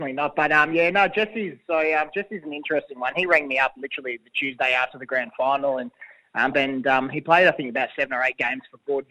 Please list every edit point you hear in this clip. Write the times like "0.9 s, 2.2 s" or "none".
6.5 s